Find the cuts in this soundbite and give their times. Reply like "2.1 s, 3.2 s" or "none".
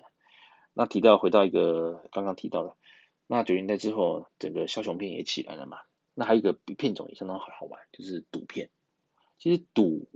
none